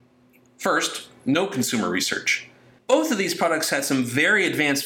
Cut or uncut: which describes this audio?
cut